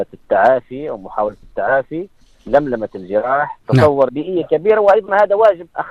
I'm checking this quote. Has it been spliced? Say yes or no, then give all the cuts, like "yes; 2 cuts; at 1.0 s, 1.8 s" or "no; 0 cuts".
yes; 1 cut; at 4.1 s